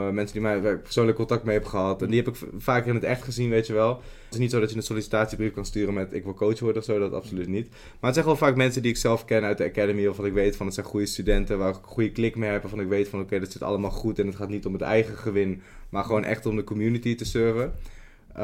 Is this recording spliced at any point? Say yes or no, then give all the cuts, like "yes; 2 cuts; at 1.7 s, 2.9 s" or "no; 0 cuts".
yes; 1 cut; at 4.3 s